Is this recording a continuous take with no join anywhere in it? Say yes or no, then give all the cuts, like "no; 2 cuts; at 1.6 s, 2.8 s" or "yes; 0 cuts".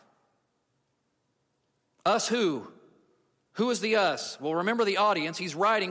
yes; 0 cuts